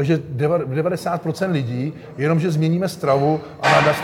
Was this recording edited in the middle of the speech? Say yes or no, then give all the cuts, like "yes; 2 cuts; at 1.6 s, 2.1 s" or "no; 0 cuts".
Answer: no; 0 cuts